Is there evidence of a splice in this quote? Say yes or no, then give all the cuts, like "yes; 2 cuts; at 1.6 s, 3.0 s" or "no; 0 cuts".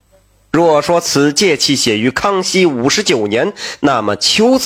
no; 0 cuts